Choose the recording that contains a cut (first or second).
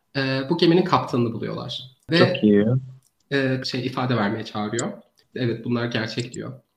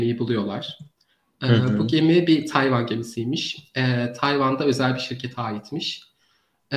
first